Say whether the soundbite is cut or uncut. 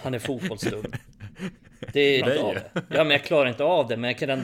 cut